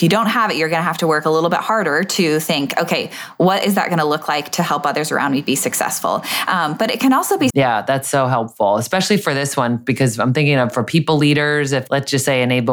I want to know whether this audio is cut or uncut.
cut